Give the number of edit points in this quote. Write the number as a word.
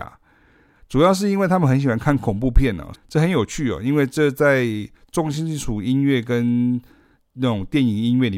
one